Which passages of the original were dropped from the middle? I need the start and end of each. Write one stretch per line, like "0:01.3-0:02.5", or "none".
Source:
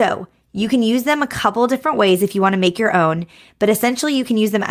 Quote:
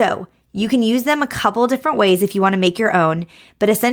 none